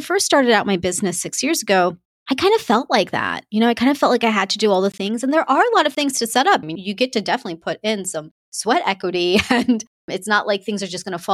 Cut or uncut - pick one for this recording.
cut